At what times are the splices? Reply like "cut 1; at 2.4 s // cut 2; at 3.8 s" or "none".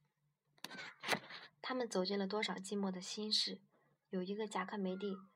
none